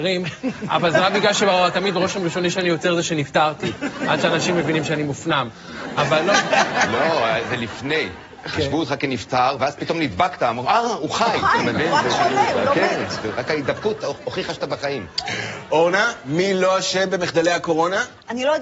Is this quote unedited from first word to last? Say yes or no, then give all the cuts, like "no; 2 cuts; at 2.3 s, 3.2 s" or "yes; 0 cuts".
yes; 0 cuts